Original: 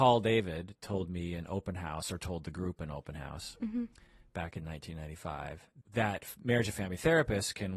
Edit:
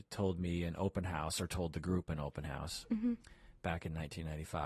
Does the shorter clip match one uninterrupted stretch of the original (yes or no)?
yes